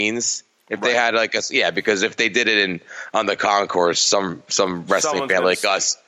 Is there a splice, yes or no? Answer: no